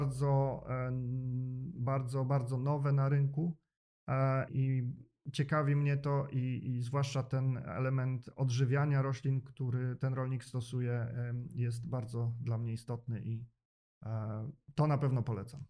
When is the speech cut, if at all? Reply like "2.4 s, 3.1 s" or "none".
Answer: 4.5 s